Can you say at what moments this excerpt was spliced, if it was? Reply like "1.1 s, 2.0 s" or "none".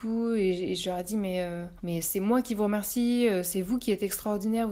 1.8 s